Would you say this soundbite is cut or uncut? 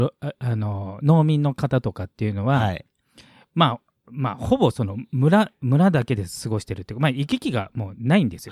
uncut